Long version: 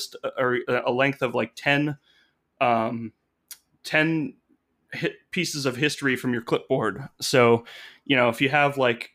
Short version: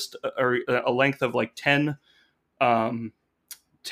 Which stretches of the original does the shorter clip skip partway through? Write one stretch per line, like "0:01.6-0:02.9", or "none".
none